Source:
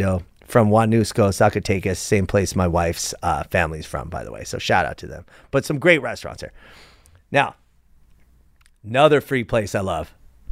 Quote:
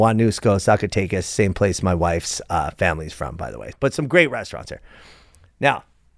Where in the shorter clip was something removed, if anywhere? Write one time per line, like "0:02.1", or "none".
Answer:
0:03.7

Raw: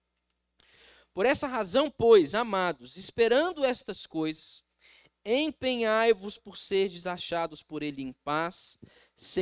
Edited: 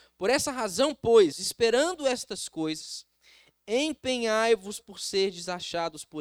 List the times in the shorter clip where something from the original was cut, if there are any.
0:01.3

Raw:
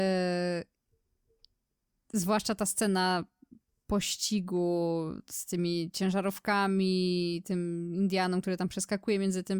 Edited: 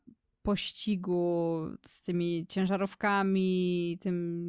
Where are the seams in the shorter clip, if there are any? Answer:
none

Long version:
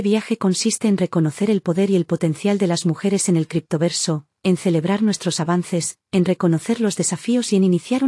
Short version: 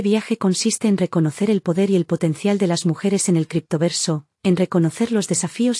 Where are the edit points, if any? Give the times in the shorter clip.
0:04.4

